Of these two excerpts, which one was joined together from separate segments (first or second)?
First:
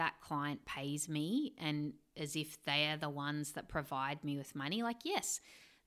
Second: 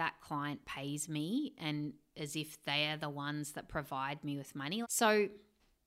second